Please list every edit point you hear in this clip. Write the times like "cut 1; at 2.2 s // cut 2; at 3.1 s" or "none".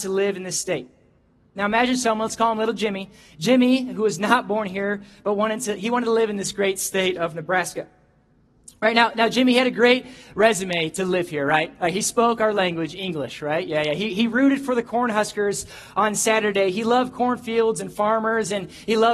none

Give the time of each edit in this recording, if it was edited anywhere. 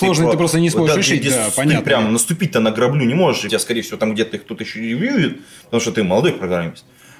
cut 1; at 3.5 s

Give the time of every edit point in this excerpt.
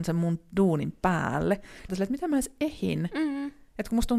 cut 1; at 1.9 s

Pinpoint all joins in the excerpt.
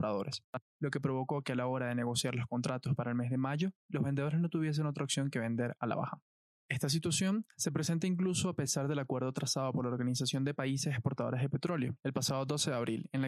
cut 1; at 12.0 s

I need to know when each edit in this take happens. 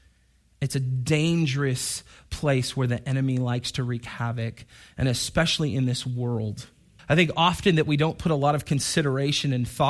cut 1; at 7.0 s

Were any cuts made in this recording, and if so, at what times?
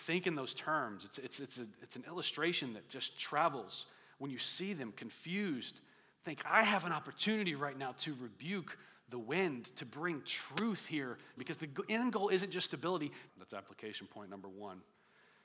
cut 1; at 11.4 s // cut 2; at 13.3 s

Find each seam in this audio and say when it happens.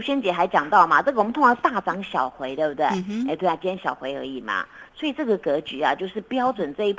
none

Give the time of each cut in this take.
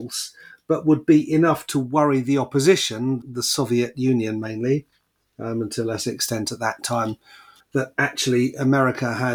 cut 1; at 3.2 s // cut 2; at 7.6 s

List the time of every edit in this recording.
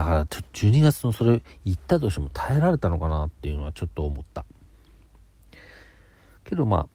none

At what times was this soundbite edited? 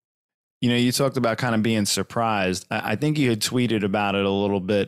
none

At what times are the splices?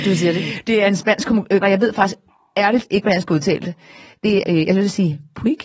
cut 1; at 1.6 s // cut 2; at 4.4 s

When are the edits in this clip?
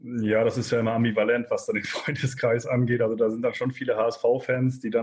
none

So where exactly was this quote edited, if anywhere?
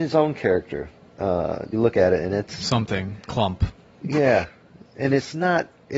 cut 1; at 1.7 s

